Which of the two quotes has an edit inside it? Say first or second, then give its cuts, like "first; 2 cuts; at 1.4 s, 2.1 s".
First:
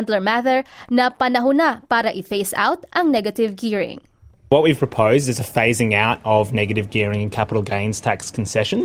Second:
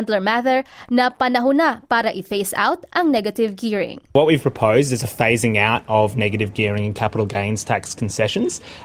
second; 1 cut; at 4.1 s